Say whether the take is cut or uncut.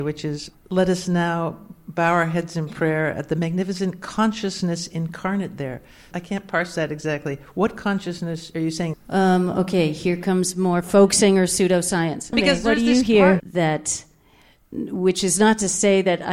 cut